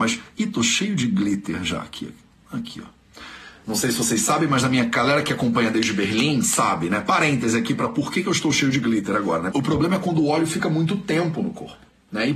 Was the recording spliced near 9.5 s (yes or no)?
yes